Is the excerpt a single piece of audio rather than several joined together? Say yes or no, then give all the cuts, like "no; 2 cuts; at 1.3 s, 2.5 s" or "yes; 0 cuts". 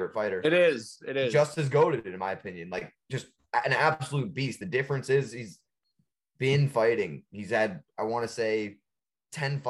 yes; 0 cuts